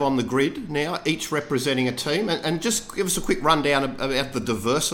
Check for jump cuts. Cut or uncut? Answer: uncut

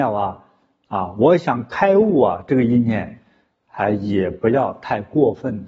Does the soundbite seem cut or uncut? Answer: uncut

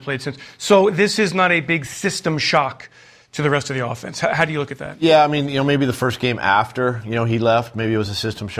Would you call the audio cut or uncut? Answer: uncut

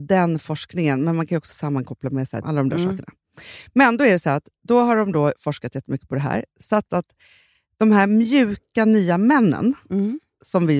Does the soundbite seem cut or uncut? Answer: cut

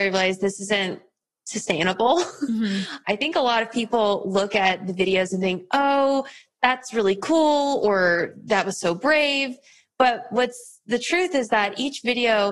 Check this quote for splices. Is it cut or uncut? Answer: cut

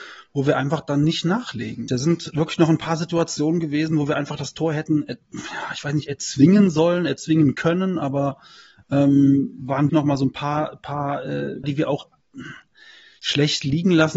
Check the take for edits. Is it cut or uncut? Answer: cut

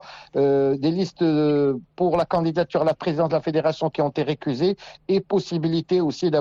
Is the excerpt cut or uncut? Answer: uncut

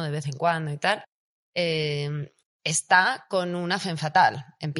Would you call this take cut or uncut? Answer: uncut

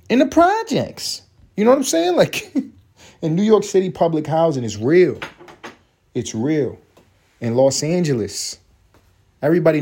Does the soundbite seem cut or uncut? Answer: uncut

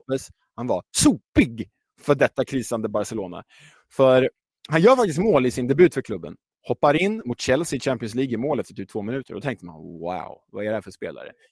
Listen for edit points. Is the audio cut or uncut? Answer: uncut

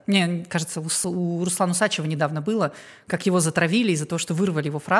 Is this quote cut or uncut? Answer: uncut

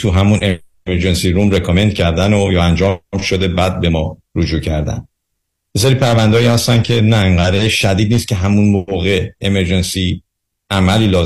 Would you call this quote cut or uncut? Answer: uncut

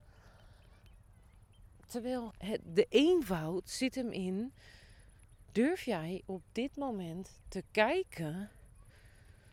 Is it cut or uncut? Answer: cut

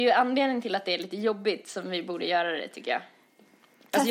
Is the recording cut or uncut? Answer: uncut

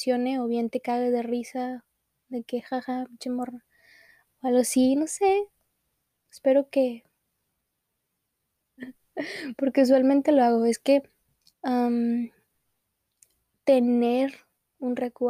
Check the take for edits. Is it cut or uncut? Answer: cut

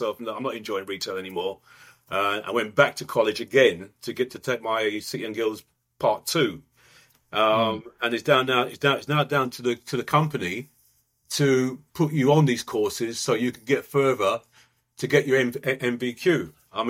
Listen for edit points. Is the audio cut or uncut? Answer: cut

